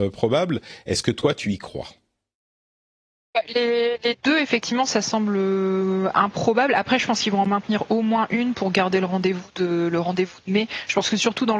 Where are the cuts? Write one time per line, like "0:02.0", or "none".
none